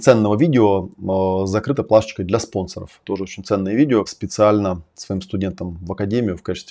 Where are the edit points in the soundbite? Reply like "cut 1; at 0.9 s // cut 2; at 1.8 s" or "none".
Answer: cut 1; at 3.0 s // cut 2; at 4.1 s